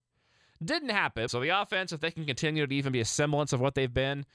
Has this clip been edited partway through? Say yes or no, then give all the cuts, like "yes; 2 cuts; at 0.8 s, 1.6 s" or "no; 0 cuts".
yes; 1 cut; at 1.3 s